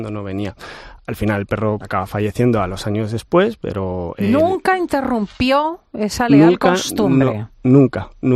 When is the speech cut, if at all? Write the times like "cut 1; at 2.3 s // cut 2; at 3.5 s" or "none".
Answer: cut 1; at 1.8 s